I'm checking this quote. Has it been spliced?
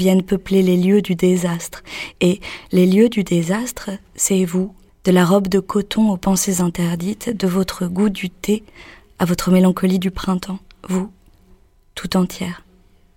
yes; 1 cut; at 4.9 s

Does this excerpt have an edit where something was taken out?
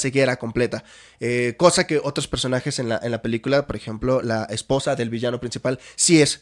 no; 0 cuts

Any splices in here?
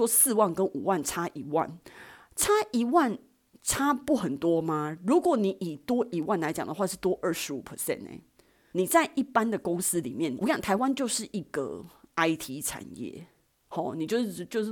yes; 2 cuts; at 8.7 s, 10.4 s

